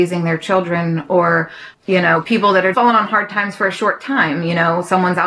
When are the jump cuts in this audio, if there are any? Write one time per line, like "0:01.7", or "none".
0:02.7